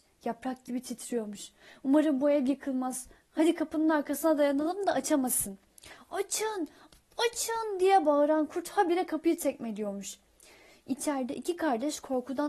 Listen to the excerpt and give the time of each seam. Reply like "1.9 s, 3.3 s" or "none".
none